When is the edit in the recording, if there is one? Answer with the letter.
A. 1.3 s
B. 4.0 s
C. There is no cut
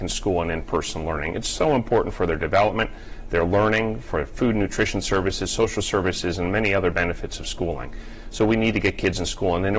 C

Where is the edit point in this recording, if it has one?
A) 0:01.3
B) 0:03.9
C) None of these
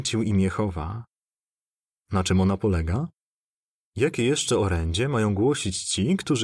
B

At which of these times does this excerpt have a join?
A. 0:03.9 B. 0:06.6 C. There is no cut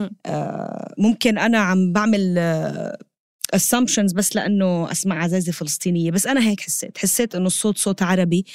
C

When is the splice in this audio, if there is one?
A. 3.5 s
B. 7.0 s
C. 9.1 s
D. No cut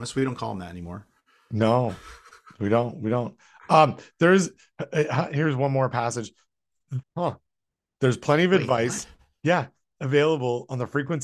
B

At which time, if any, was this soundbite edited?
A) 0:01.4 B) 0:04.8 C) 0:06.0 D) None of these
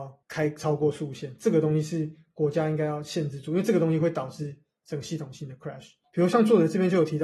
C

